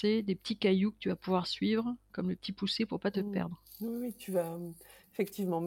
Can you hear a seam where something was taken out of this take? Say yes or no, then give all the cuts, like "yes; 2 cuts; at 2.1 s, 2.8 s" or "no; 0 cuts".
no; 0 cuts